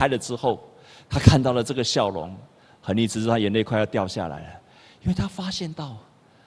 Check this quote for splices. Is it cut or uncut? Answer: uncut